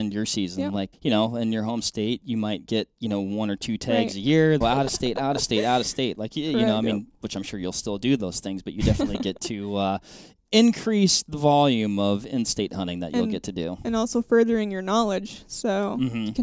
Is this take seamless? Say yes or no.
no